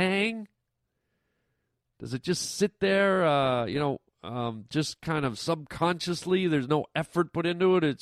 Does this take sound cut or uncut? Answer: uncut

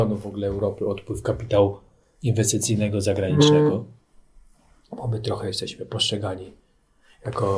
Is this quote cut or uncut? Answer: uncut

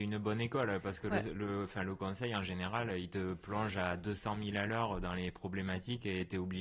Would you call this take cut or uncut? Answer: uncut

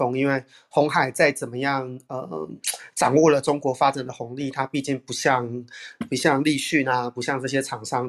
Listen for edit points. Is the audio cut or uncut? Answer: uncut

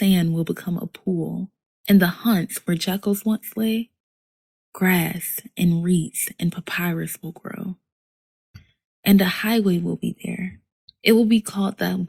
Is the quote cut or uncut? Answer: cut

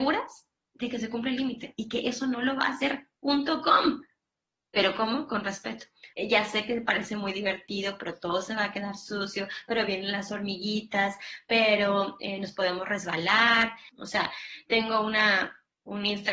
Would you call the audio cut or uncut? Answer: cut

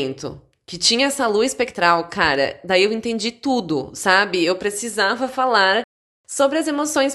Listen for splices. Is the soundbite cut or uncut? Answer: uncut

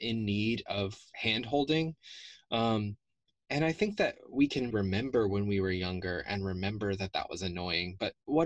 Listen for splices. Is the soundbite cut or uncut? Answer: cut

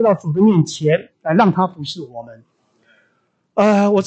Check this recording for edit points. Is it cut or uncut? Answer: uncut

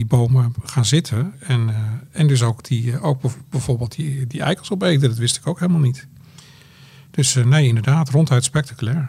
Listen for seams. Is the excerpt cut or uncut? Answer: uncut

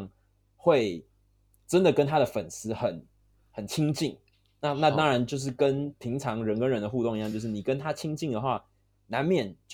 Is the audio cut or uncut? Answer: uncut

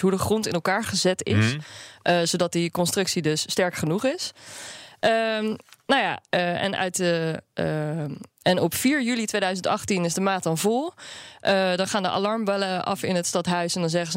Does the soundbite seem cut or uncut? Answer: cut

